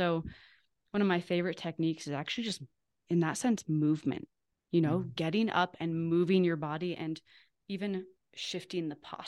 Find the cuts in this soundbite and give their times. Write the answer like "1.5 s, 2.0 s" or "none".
none